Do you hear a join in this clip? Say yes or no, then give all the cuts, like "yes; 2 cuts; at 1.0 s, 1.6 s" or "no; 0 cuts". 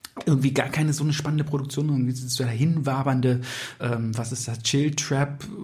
yes; 1 cut; at 3.8 s